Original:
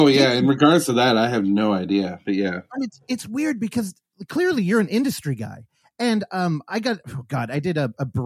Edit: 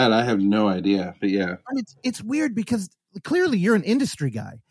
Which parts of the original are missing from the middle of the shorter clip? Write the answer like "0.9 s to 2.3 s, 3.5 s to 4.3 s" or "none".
none

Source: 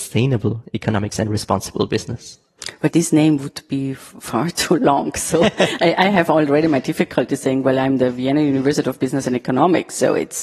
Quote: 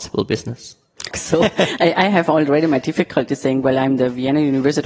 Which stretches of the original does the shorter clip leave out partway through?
2.7 s to 5.1 s

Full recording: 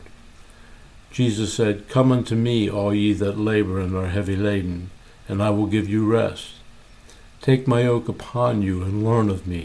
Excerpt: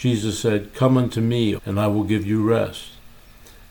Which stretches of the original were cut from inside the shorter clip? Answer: 2.7 s to 5.2 s

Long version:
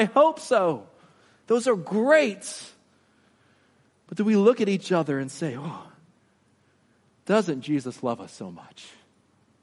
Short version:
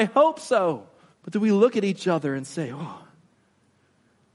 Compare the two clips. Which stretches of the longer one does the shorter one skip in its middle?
1.1 s to 4.0 s

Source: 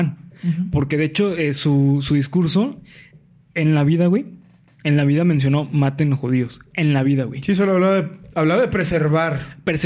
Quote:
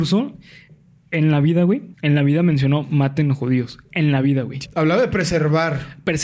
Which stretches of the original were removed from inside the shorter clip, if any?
4.4 s to 4.8 s, 7.5 s to 8.3 s

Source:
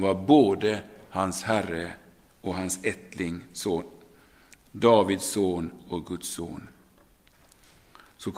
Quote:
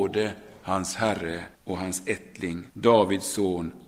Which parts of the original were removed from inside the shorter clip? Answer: 2.0 s to 2.3 s, 3.5 s to 4.7 s

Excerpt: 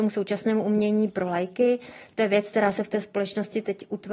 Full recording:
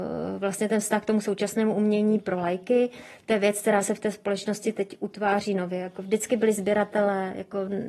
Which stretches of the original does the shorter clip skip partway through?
none

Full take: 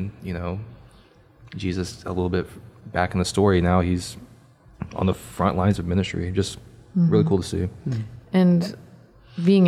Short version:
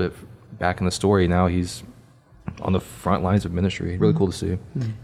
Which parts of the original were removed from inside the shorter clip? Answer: 6.3 s to 7.1 s

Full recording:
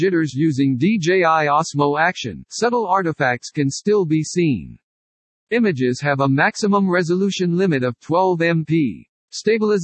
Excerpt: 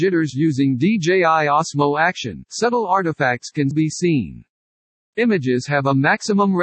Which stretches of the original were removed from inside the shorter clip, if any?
3.7 s to 4.0 s

